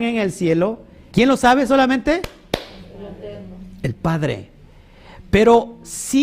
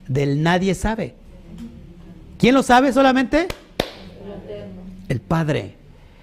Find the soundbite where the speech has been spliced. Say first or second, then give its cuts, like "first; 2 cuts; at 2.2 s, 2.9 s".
first; 1 cut; at 1.1 s